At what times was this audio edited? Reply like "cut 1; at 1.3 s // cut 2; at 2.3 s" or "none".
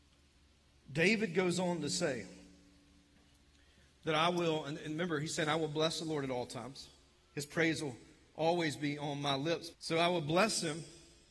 cut 1; at 9.7 s